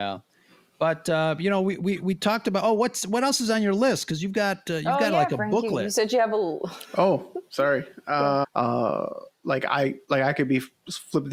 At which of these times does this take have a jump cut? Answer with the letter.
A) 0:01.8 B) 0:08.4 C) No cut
B